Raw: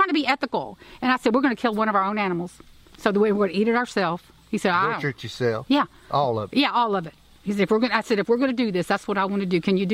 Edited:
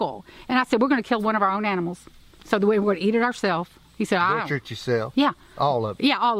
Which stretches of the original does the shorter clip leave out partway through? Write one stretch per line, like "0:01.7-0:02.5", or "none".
none

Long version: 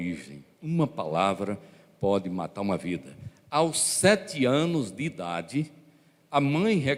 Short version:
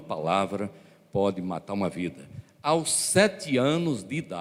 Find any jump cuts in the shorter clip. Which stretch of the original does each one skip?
none

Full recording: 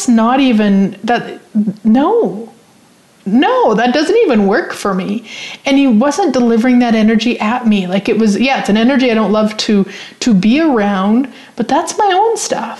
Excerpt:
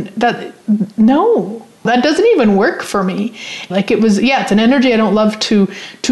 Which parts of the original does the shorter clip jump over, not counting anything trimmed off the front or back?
0:02.7-0:03.8
0:05.6-0:07.9

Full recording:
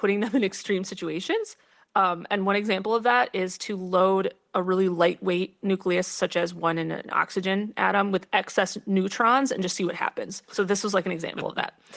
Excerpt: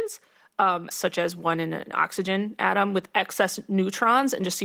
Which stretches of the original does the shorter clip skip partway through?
0:02.3-0:06.1

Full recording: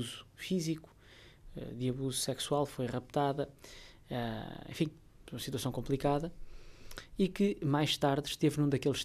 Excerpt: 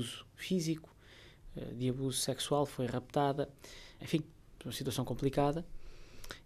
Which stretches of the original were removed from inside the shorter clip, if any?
0:04.0-0:04.7

